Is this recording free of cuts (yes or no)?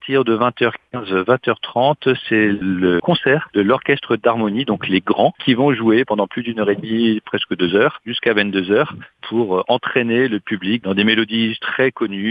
yes